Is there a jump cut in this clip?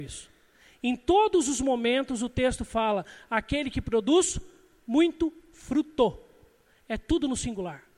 no; 0 cuts

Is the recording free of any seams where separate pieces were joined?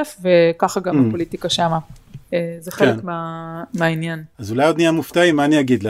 yes; 0 cuts

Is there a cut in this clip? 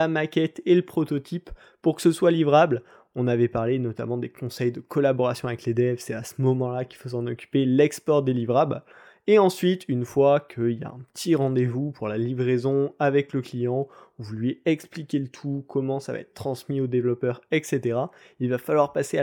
no; 0 cuts

